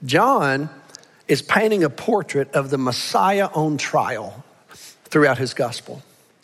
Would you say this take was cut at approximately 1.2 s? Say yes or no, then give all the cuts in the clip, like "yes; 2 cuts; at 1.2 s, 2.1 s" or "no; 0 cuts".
no; 1 cut; at 5.0 s